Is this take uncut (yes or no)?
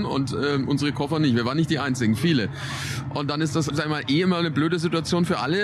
no